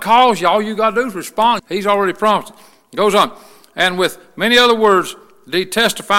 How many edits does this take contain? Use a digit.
1